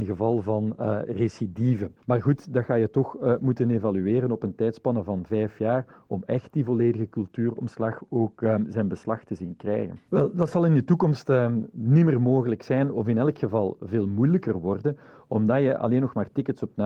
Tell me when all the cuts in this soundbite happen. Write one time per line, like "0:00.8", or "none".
0:02.0
0:10.1